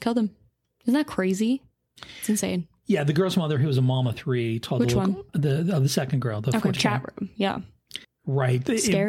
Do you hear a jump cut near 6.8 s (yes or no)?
yes